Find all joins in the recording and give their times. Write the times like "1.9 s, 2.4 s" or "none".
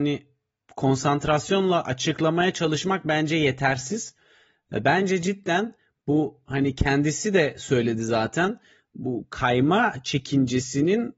none